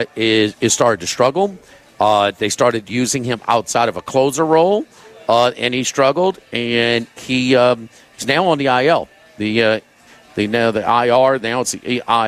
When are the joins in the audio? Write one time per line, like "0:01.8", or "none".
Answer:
none